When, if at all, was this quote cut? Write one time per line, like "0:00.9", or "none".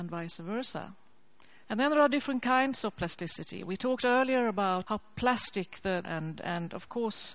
0:01.6
0:04.8
0:06.0